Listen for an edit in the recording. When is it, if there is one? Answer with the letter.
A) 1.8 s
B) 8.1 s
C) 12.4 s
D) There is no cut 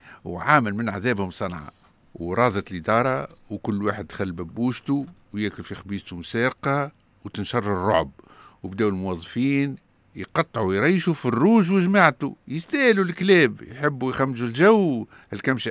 C